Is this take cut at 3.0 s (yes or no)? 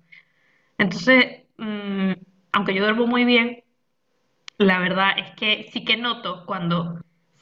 no